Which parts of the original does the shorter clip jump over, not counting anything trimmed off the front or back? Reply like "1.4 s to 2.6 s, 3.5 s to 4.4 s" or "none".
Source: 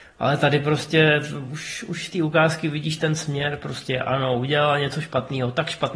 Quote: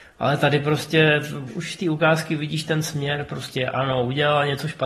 1.5 s to 1.8 s